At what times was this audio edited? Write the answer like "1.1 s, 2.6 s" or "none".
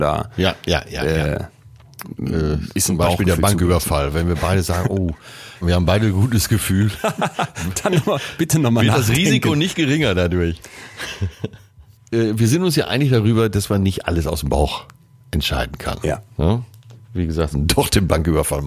5.6 s, 17.5 s